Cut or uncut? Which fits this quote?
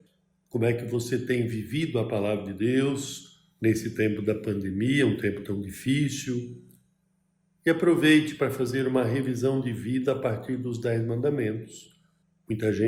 uncut